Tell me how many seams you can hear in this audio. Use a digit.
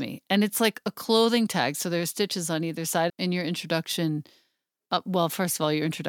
1